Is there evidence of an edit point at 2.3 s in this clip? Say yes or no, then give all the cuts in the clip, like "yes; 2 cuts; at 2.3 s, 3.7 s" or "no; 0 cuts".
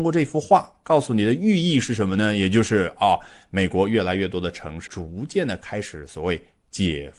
no; 1 cut; at 4.9 s